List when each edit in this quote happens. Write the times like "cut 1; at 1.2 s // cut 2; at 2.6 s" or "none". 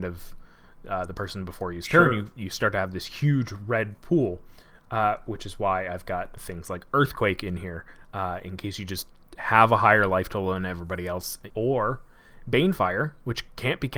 cut 1; at 11.5 s